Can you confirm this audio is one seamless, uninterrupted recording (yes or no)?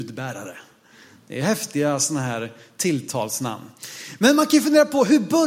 yes